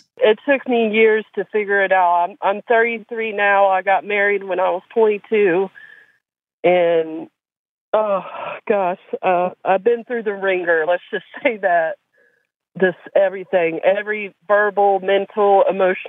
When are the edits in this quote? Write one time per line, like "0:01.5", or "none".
none